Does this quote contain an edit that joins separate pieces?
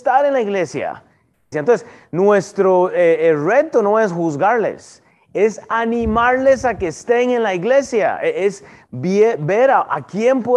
yes; 1 cut; at 1.5 s

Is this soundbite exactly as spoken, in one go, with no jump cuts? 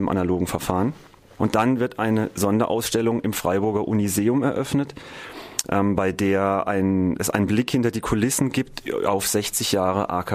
no; 1 cut; at 1.4 s

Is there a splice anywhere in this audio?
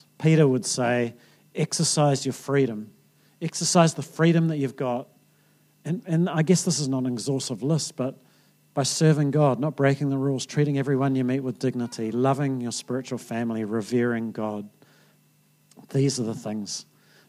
no; 0 cuts

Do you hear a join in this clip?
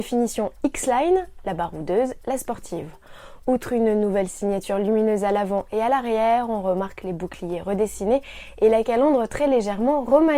yes; 1 cut; at 2.2 s

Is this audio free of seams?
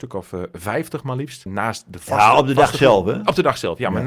no; 1 cut; at 1.5 s

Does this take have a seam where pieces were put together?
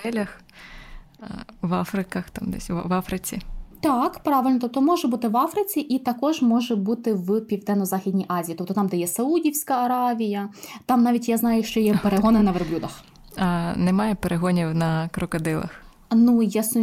no; 0 cuts

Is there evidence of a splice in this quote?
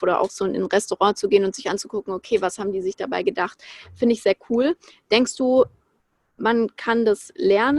no; 0 cuts

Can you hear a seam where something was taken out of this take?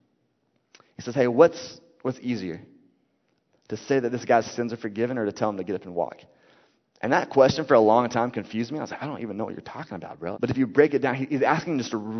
yes; 1 cut; at 10.3 s

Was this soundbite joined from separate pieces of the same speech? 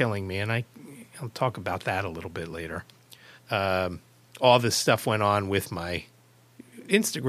yes; 1 cut; at 3.4 s

